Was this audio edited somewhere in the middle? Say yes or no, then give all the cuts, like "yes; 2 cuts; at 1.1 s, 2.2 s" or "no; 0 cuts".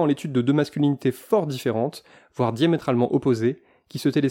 no; 0 cuts